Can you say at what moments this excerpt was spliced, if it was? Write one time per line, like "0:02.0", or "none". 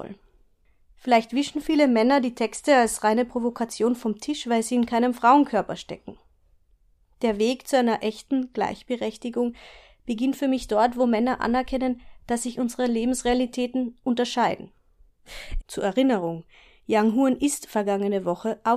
0:15.6